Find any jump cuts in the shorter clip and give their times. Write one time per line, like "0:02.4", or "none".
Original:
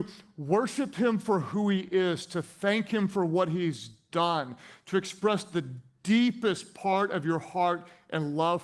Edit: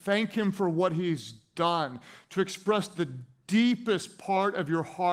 none